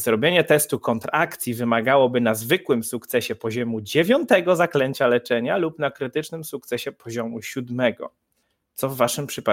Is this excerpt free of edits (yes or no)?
yes